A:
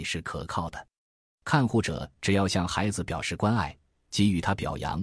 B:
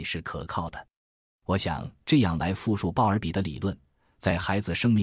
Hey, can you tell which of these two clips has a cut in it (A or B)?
A